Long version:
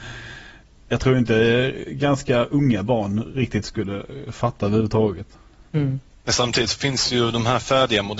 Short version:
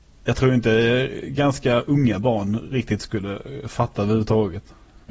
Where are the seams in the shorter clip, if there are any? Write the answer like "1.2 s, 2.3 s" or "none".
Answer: none